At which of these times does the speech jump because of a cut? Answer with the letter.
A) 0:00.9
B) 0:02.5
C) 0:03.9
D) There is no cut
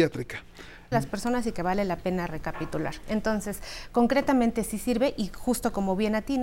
A